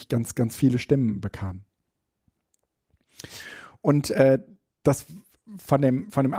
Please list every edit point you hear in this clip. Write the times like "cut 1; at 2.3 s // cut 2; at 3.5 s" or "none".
none